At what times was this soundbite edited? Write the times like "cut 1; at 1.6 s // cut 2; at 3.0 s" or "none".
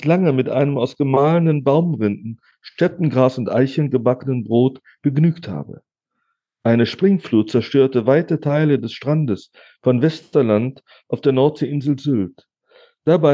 none